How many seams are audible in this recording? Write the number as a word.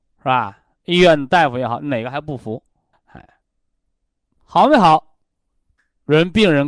one